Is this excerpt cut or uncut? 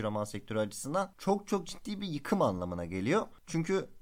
uncut